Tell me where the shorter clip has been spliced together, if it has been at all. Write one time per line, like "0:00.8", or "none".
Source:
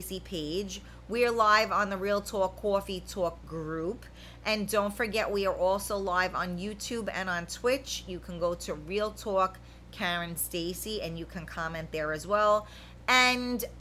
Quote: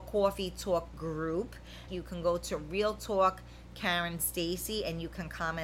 0:01.9